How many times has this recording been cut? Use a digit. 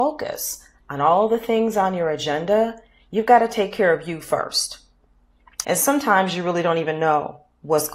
1